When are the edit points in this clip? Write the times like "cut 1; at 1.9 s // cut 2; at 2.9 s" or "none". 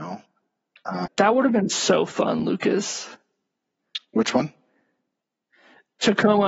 cut 1; at 1.1 s

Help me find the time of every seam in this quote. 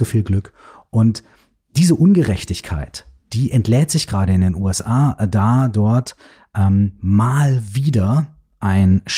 none

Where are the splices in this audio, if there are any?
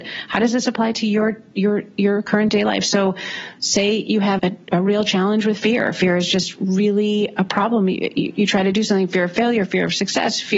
cut 1; at 4.4 s

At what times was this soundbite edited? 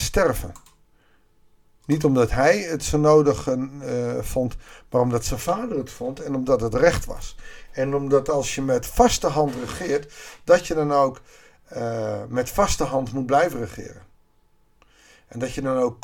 none

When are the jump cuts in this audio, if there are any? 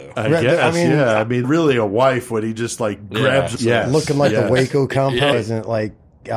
cut 1; at 1.4 s // cut 2; at 3.5 s // cut 3; at 5.3 s

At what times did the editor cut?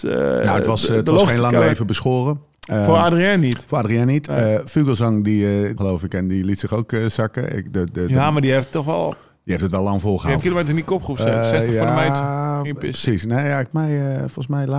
cut 1; at 5.8 s // cut 2; at 10.4 s // cut 3; at 13.7 s

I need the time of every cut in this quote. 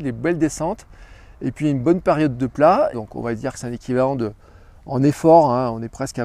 cut 1; at 2.9 s

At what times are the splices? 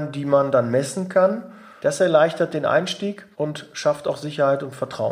cut 1; at 1.8 s // cut 2; at 3.3 s

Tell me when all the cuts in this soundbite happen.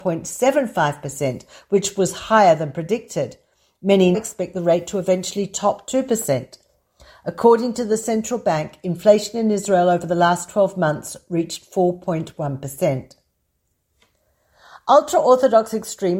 cut 1; at 4.1 s

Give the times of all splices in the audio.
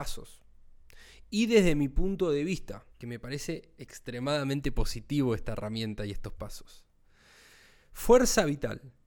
cut 1; at 2.9 s

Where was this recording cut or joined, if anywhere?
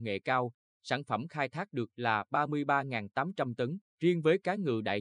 cut 1; at 3.9 s

